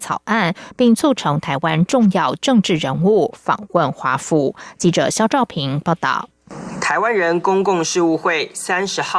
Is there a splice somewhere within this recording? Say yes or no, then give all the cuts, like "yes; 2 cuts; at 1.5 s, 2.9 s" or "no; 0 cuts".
no; 0 cuts